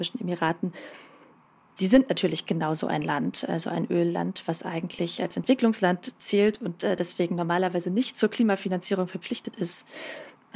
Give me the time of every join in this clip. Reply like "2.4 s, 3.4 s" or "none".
none